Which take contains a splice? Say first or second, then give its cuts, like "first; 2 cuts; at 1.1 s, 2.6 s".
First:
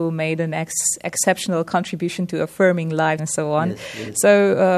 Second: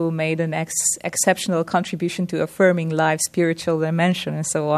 first; 1 cut; at 3.2 s